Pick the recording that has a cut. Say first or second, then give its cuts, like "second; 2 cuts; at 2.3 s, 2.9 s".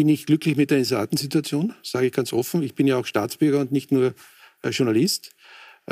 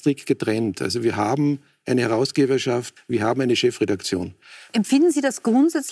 second; 2 cuts; at 3.0 s, 4.7 s